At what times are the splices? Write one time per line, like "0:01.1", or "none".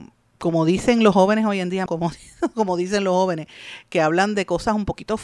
0:01.9